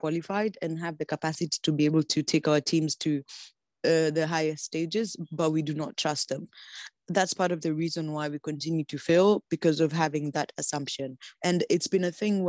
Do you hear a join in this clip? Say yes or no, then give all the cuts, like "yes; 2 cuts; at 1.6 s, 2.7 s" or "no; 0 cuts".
yes; 2 cuts; at 6.9 s, 11.3 s